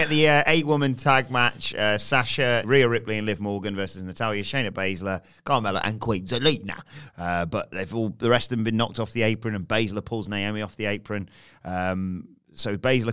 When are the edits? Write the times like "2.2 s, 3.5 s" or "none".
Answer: 2.6 s, 7.1 s